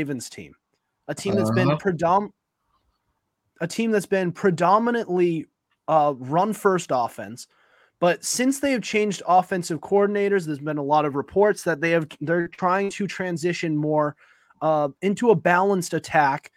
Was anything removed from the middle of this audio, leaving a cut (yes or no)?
no